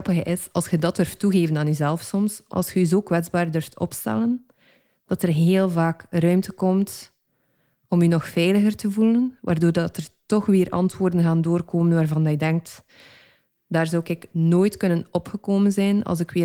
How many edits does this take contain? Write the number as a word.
one